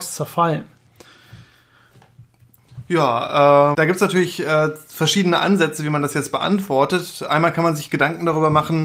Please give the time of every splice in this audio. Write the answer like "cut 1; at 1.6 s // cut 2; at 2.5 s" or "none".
cut 1; at 3.7 s